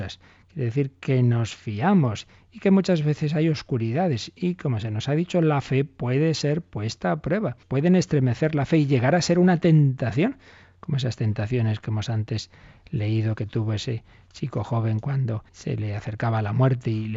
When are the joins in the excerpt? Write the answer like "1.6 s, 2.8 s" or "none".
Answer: 7.6 s, 15.5 s